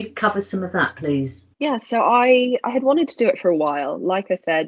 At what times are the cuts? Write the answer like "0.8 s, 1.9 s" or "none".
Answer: 1.5 s